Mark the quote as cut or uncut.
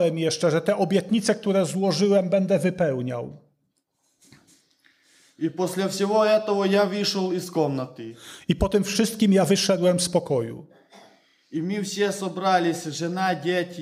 uncut